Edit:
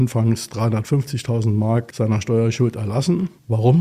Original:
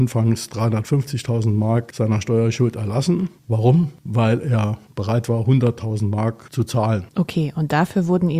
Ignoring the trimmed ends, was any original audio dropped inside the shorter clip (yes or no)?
no